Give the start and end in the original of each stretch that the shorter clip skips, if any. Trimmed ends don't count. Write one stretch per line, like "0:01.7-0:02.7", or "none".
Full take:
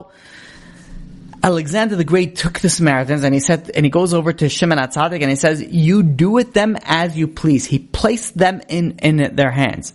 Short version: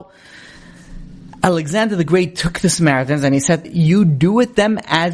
0:03.6-0:05.6

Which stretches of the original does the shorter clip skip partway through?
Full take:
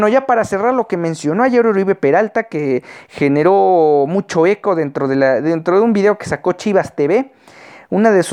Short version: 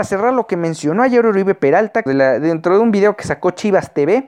0:02.5-0:05.1

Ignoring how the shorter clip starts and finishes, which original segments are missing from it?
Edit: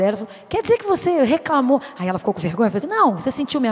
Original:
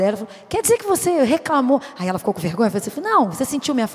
0:02.8-0:02.9

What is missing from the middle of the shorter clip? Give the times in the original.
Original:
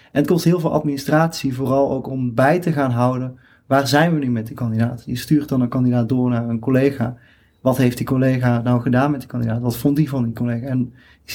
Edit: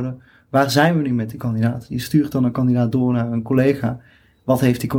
none

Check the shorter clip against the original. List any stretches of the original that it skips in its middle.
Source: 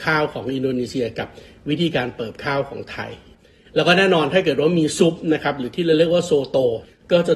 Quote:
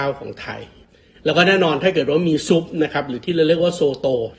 none

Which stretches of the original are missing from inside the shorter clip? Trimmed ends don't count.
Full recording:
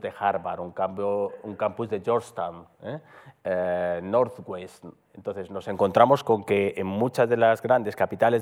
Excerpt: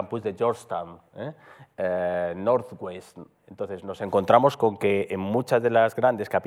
none

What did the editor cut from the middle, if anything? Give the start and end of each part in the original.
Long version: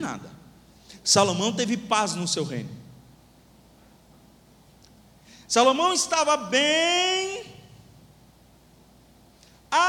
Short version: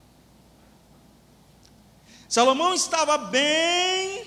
none

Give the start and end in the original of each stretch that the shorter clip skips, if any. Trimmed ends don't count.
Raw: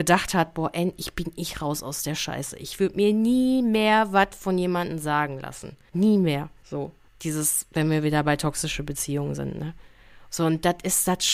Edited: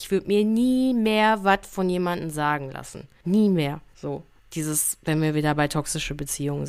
none

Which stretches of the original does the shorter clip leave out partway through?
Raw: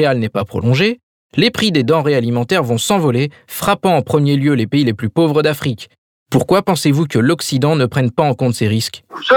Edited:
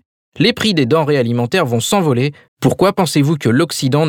0:03.5-0:06.2

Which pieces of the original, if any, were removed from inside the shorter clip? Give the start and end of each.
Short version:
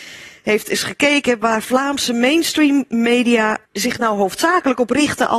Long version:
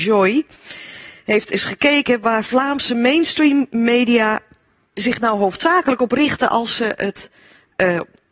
0:04.5-0:04.9

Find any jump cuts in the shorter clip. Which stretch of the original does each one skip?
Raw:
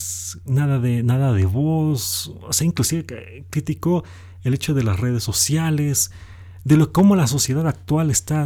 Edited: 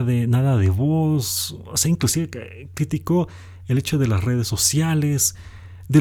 none

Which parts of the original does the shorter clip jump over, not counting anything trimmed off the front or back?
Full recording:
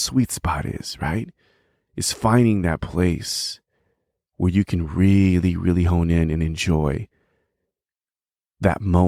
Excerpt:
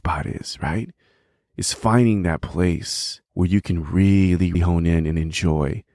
0:03.6-0:04.3
0:05.6-0:05.8

